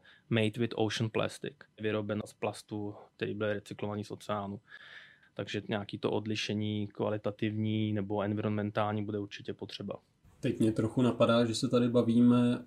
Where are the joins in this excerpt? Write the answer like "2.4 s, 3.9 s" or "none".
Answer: 5.2 s

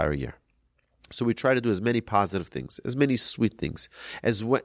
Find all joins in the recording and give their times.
none

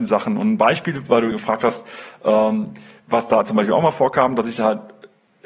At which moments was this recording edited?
1.3 s

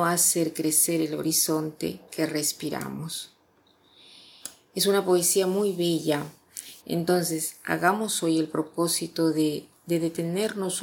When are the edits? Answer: 6.8 s

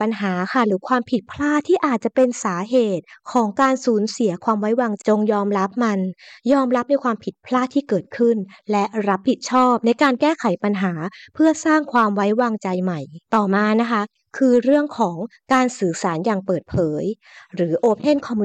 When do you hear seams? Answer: 5.0 s, 13.3 s

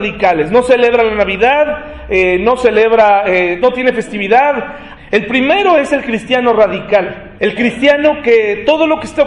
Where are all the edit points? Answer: 3.6 s, 5.0 s, 7.4 s

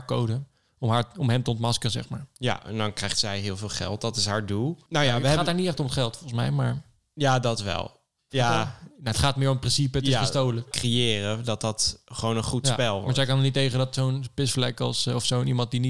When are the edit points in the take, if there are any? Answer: 10.7 s

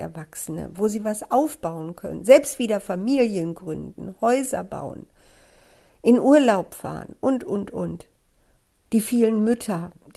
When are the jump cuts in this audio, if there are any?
8.9 s

